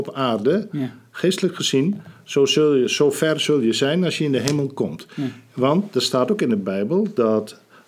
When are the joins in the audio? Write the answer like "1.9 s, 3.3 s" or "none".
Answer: none